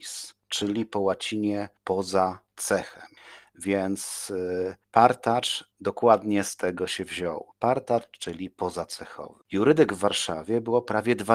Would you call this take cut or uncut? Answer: uncut